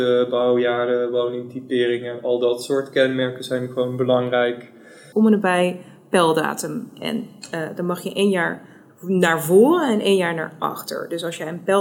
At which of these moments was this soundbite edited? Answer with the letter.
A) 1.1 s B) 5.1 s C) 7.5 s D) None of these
B